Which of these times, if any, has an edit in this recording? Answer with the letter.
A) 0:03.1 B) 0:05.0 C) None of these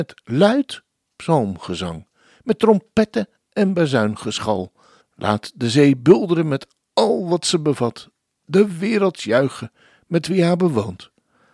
B